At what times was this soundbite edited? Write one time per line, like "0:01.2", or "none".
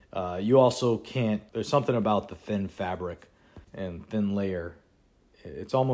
0:01.5
0:03.6